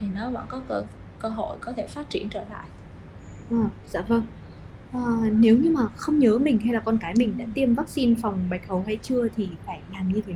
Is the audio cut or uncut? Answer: uncut